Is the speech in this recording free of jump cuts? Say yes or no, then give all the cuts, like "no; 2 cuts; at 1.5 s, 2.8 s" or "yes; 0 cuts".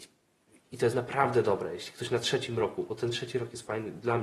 yes; 0 cuts